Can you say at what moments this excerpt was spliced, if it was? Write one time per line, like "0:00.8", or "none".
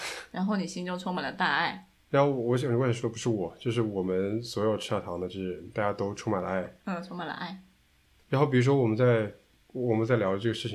none